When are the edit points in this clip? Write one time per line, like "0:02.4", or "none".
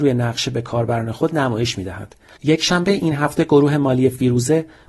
0:02.4